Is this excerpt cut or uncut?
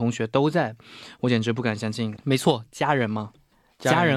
cut